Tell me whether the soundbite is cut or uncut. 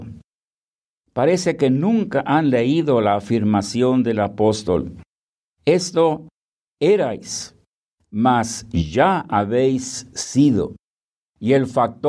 uncut